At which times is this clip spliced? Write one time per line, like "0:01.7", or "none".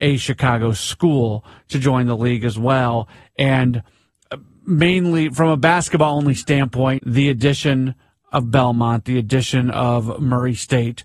0:07.0